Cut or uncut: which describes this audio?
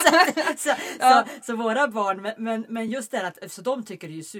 uncut